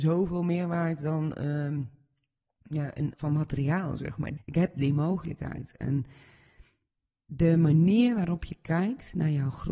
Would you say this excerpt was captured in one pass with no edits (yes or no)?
no